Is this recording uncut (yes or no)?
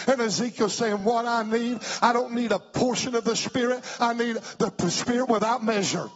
yes